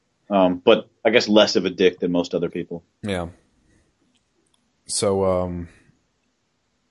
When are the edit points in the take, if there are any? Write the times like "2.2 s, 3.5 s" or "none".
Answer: none